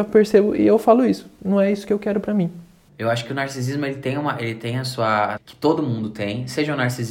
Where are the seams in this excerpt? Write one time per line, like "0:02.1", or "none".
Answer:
0:02.9
0:05.4